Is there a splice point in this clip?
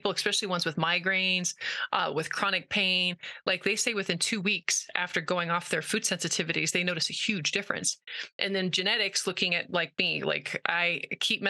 no; 0 cuts

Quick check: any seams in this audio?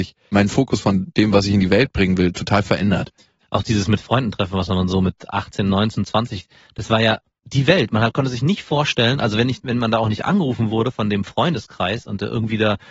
no; 0 cuts

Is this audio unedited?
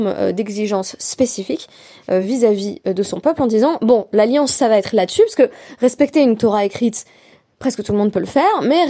yes; 0 cuts

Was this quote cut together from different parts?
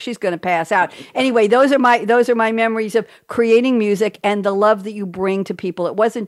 no; 0 cuts

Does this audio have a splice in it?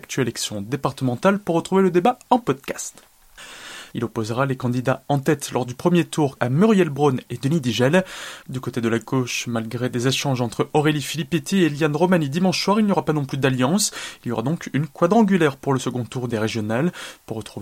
yes; 3 cuts; at 3.9 s, 6.4 s, 8.4 s

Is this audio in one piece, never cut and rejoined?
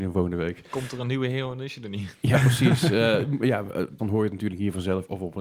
no; 1 cut; at 4.0 s

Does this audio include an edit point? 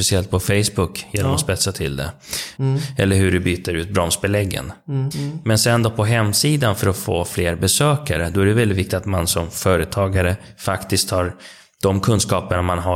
yes; 2 cuts; at 2.6 s, 5.1 s

